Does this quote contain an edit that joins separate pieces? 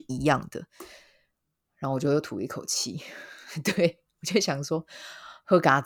no; 0 cuts

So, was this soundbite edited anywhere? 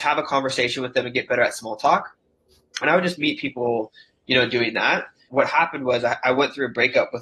yes; 2 cuts; at 2.8 s, 5.3 s

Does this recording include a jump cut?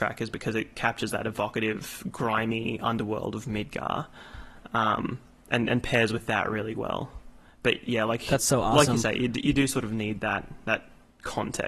no; 0 cuts

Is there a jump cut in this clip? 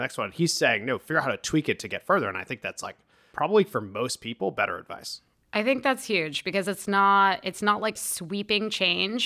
no; 0 cuts

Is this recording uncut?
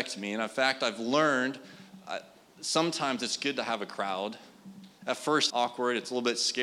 no; 1 cut; at 5.5 s

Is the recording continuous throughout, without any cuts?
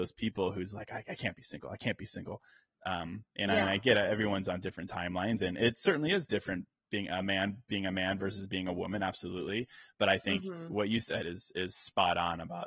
yes; 0 cuts

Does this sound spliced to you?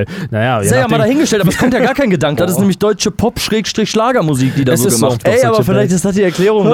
yes; 2 cuts; at 2.4 s, 5.2 s

